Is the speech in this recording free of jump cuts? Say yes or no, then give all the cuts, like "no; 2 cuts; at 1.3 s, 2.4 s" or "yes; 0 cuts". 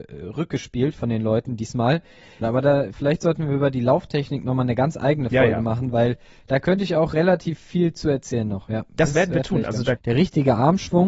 no; 2 cuts; at 2.4 s, 10.0 s